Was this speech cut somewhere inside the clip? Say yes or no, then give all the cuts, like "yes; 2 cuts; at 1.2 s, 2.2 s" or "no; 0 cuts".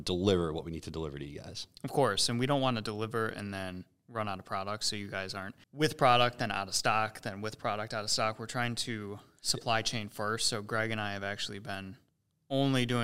yes; 1 cut; at 5.6 s